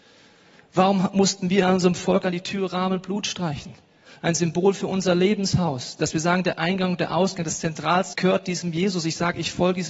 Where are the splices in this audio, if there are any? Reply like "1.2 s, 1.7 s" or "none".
8.1 s